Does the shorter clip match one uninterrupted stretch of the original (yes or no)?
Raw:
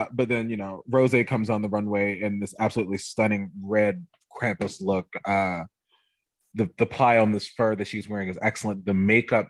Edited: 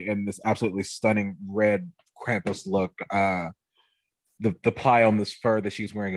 yes